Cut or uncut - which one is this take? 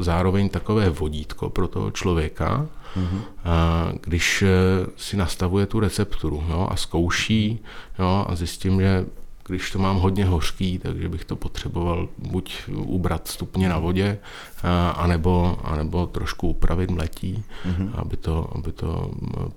uncut